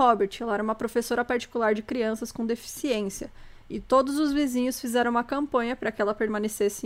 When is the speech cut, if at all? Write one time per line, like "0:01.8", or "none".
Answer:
none